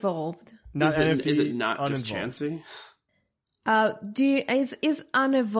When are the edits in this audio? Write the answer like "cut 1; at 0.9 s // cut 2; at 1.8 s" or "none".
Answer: none